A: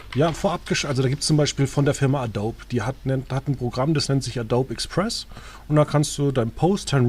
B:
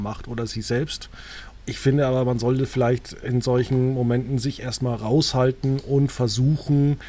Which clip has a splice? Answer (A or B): B